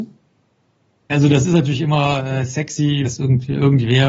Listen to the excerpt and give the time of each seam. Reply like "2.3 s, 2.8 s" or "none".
1.1 s, 3.0 s